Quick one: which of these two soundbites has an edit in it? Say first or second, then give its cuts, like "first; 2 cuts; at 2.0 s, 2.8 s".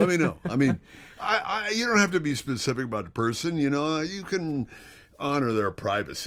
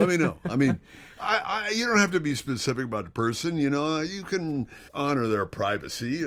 second; 1 cut; at 4.9 s